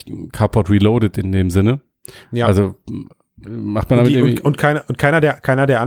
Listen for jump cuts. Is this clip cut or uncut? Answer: uncut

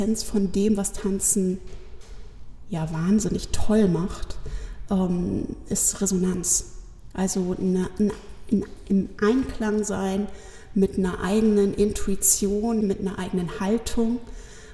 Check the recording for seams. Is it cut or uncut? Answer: cut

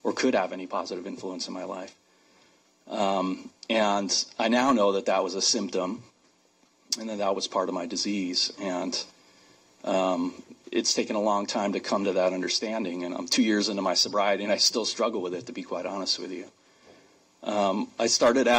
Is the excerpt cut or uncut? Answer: uncut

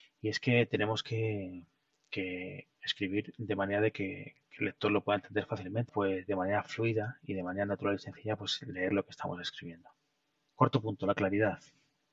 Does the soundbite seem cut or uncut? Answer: cut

